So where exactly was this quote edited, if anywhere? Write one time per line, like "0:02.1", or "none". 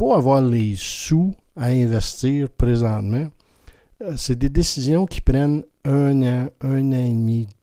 none

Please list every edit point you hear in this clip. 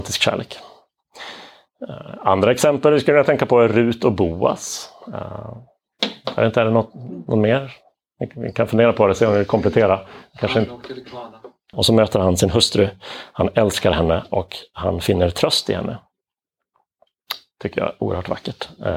0:11.7

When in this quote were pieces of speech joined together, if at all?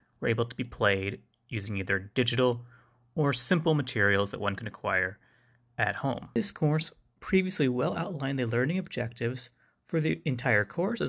0:06.3

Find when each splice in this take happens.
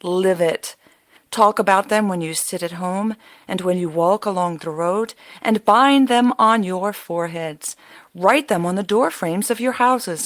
0:01.2

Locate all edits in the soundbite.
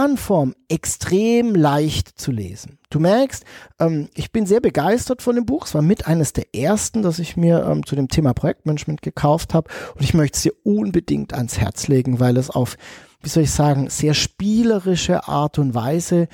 none

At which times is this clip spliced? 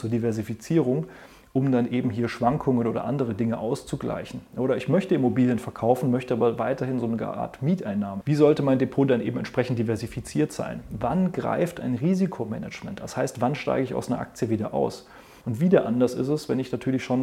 0:08.2
0:15.4

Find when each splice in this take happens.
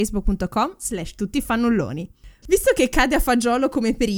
0:02.4

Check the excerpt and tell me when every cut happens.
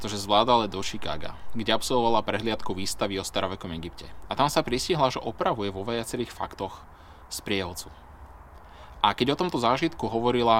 none

